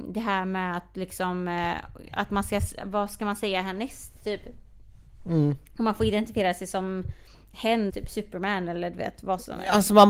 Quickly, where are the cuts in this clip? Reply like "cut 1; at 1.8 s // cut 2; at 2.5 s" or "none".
cut 1; at 7.9 s

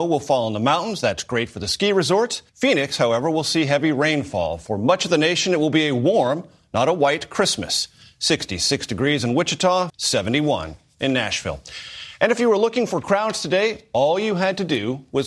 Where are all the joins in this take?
cut 1; at 2.5 s // cut 2; at 9.9 s

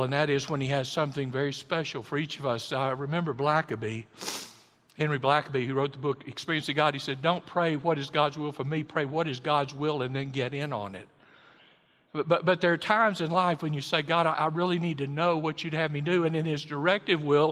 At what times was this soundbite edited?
none

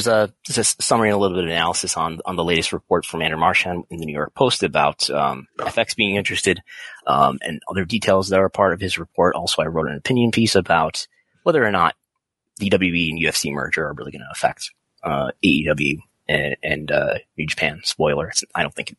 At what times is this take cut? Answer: none

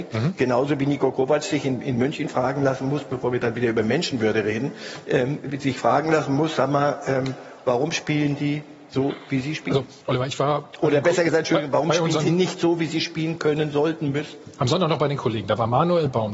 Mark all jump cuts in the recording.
cut 1; at 10.0 s

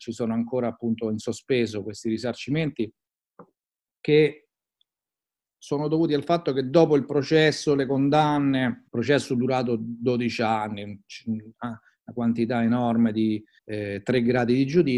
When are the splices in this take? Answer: cut 1; at 8.9 s // cut 2; at 13.6 s

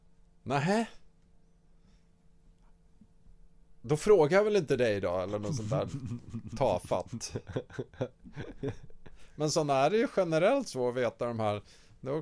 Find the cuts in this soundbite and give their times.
cut 1; at 9.1 s

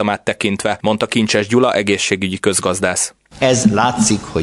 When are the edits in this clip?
cut 1; at 3.4 s

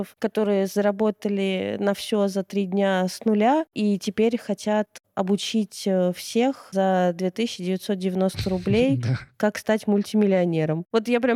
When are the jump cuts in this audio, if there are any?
none

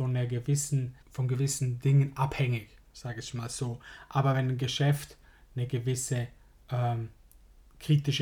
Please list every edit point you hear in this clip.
cut 1; at 1.0 s

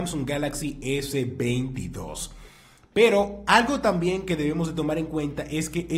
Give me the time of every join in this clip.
none

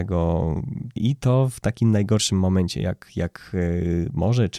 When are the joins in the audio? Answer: cut 1; at 1.0 s

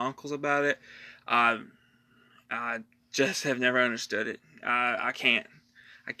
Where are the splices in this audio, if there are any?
none

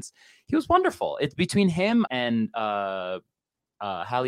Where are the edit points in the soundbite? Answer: cut 1; at 2.1 s

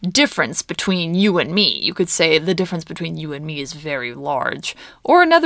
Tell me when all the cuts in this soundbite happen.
none

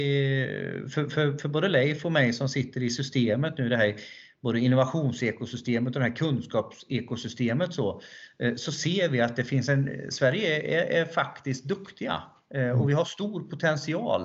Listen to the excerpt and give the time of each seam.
none

